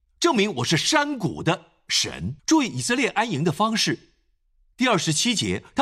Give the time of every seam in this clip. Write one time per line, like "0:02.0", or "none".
0:02.4